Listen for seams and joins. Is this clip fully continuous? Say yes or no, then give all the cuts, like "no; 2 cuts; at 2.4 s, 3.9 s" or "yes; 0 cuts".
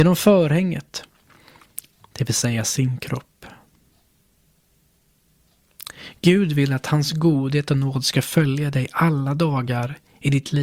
yes; 0 cuts